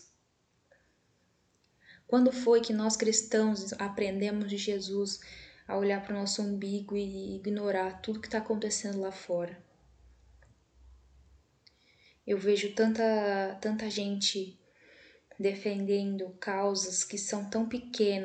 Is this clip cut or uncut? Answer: uncut